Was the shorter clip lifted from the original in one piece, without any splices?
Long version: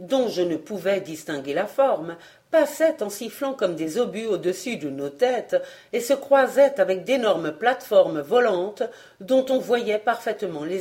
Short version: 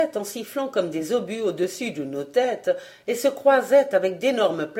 yes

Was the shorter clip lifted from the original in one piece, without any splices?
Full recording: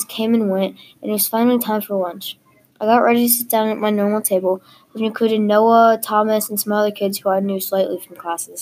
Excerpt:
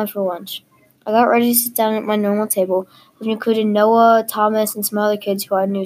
yes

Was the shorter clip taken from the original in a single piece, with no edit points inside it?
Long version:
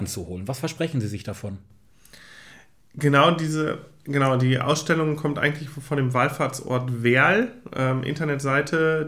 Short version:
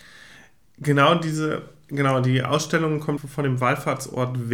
no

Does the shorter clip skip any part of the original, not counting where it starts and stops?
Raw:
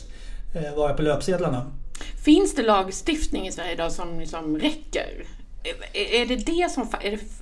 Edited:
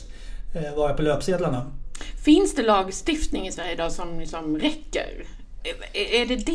no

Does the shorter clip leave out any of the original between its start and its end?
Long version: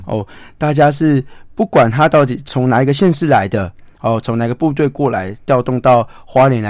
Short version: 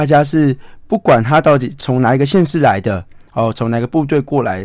no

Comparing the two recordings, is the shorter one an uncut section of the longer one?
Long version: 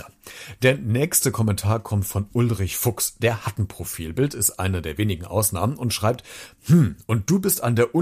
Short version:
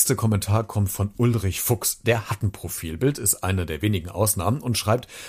yes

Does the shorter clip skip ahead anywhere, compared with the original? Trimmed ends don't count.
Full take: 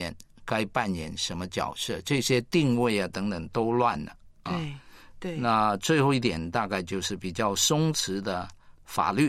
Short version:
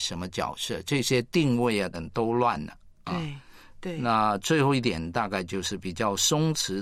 yes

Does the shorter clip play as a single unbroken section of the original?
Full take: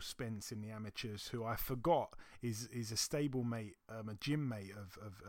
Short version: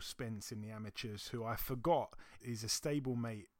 no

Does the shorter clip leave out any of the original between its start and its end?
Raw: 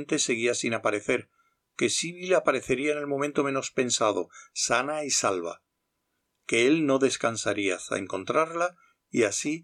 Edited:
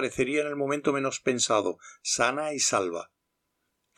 no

